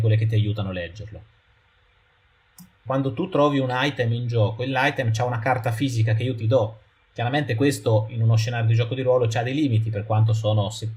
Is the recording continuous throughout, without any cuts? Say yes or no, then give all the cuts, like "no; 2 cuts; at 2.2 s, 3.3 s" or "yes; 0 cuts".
no; 2 cuts; at 2.9 s, 9.9 s